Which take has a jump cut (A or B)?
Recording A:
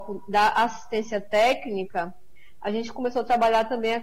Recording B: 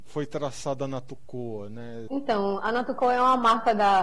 B